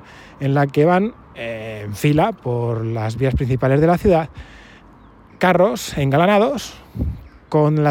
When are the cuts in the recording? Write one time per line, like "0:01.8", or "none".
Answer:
0:01.2

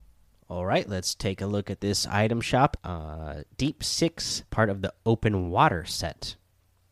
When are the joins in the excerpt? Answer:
0:02.8
0:04.5

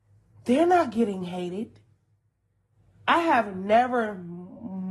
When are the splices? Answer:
none

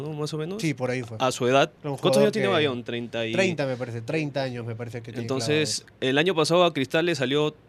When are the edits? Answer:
0:01.8

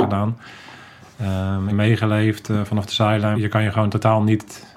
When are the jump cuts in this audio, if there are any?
0:01.7
0:03.3

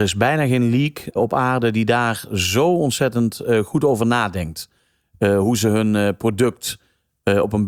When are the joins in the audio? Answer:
0:01.2

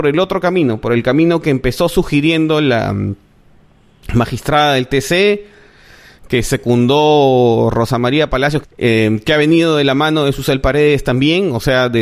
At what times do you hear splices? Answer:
0:08.6

